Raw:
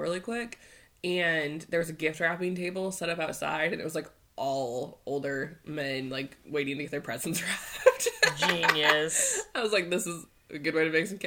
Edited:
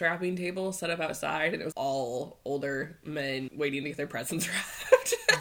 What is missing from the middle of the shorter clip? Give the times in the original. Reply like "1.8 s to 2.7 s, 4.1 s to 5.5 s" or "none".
3.9 s to 4.3 s, 6.1 s to 6.4 s